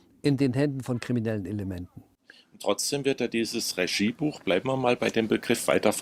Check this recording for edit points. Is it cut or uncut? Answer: uncut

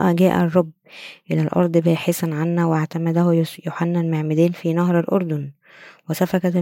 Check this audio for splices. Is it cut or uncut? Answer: uncut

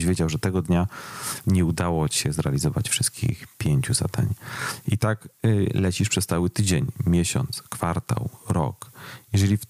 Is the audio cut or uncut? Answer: uncut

